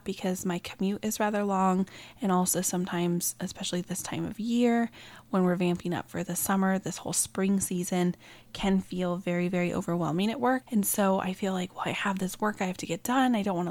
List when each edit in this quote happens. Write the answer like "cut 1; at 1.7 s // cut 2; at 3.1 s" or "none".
cut 1; at 10.6 s